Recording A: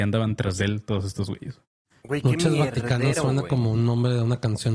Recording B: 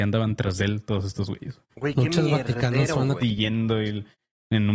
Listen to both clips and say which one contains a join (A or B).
B